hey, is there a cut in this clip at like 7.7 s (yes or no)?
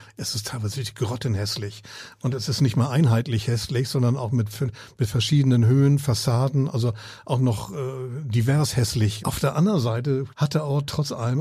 no